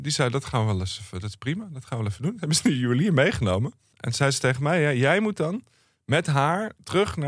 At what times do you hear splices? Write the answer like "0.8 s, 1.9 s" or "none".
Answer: 3.9 s